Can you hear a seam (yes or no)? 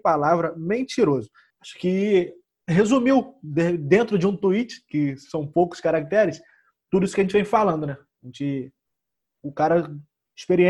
yes